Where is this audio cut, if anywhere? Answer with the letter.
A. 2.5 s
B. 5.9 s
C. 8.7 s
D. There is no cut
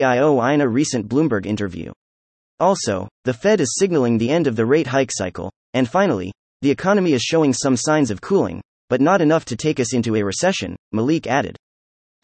D